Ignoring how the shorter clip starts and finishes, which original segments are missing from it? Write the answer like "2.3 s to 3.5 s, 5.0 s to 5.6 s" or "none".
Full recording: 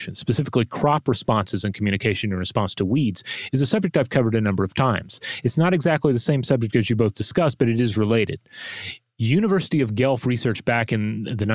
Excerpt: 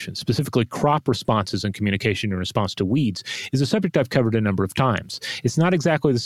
none